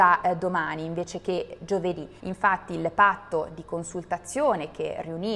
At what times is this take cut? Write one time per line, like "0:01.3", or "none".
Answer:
0:02.2